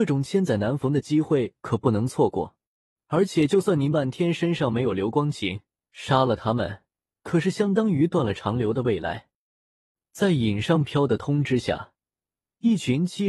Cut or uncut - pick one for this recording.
cut